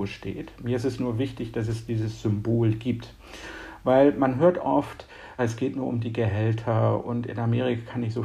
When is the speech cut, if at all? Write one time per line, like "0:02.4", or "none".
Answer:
0:05.4